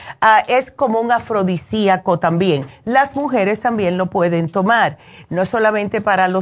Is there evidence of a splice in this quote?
no; 0 cuts

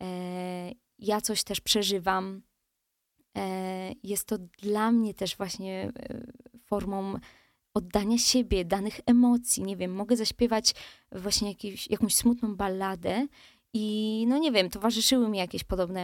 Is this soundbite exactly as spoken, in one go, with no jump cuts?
yes; 0 cuts

